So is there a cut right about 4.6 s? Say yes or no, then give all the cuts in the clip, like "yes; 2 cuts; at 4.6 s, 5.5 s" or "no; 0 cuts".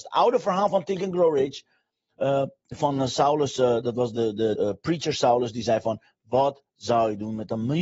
yes; 1 cut; at 4.6 s